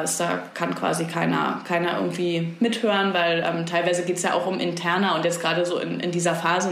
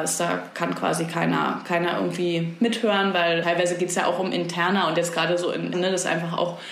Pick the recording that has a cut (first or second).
second